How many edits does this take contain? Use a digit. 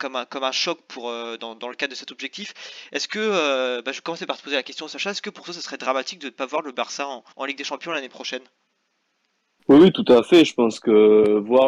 1